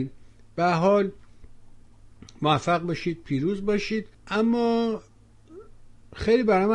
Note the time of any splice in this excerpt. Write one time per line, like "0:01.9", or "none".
0:04.1